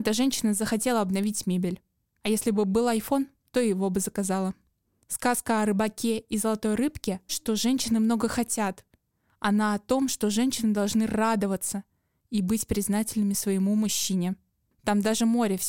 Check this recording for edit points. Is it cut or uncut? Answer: cut